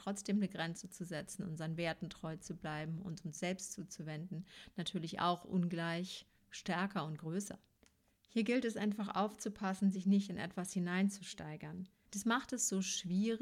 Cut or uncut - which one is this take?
cut